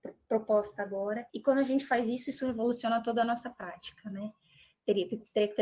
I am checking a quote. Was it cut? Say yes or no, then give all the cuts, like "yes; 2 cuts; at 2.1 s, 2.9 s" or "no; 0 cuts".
yes; 1 cut; at 1.3 s